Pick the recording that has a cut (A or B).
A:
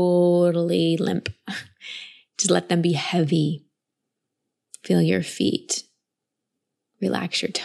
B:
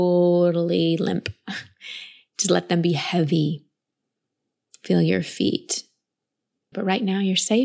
B